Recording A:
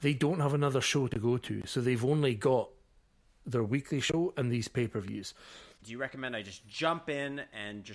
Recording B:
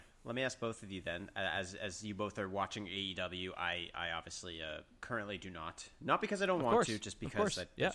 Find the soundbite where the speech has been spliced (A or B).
A